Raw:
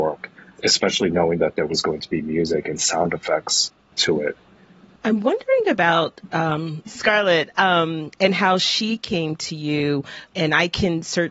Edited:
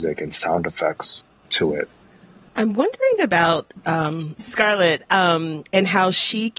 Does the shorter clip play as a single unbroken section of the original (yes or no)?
yes